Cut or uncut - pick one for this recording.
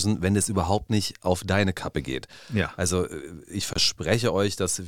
uncut